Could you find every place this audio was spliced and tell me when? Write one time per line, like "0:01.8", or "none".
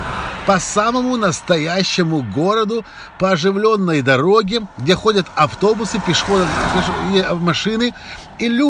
none